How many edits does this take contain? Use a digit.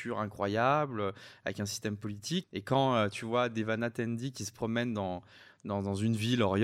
1